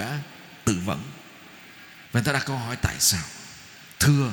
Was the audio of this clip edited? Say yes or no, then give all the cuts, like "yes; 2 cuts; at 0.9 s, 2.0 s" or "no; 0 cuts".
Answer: yes; 1 cut; at 2.1 s